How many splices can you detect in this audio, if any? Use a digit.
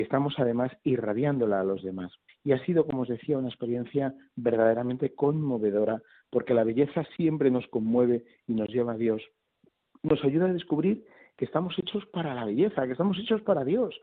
1